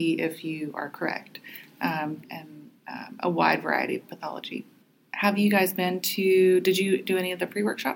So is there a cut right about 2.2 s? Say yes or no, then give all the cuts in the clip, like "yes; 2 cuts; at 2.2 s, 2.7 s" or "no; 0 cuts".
yes; 1 cut; at 2.2 s